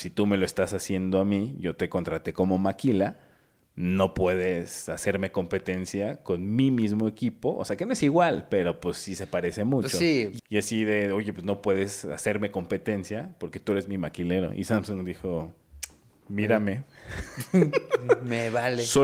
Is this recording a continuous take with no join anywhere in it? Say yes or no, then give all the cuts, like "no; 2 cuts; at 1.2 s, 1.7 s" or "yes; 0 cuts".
no; 1 cut; at 10.4 s